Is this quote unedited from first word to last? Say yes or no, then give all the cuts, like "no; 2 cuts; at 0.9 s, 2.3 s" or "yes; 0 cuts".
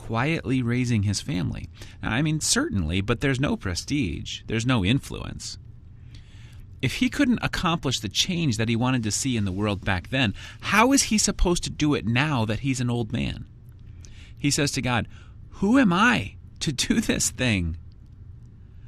no; 1 cut; at 2.4 s